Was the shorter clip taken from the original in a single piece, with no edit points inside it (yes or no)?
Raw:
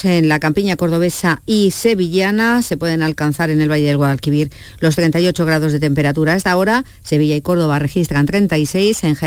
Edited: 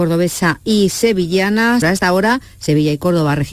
no